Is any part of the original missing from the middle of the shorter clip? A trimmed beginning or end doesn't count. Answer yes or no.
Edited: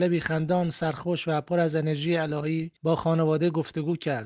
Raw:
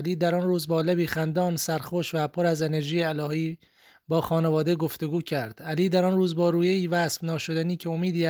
yes